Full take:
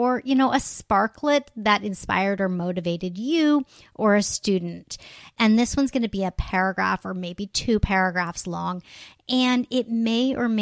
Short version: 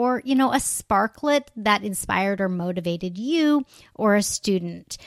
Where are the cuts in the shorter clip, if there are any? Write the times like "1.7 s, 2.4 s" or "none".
none